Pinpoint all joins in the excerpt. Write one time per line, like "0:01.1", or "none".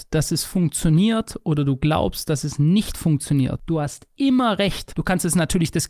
0:04.9